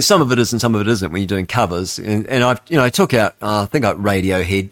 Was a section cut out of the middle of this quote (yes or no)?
no